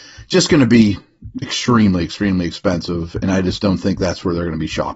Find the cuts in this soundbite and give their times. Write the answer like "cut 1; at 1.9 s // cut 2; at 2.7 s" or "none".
none